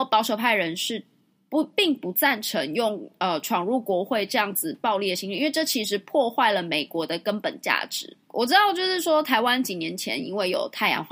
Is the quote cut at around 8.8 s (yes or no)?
no